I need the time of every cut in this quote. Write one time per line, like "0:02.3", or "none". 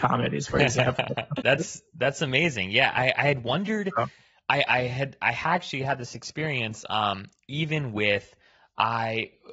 0:01.4